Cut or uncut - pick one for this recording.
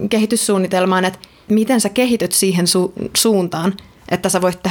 uncut